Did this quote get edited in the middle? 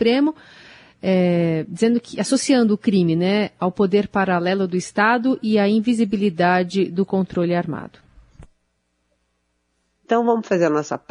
yes; 1 cut; at 10.0 s

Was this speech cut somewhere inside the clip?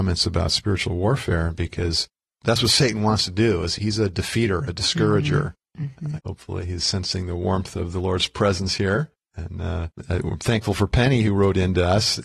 yes; 1 cut; at 6.2 s

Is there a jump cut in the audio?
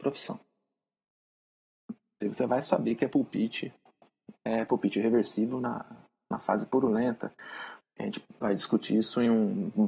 yes; 2 cuts; at 2.2 s, 7.8 s

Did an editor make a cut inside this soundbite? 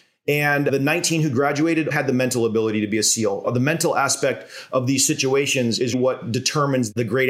yes; 2 cuts; at 1.9 s, 5.9 s

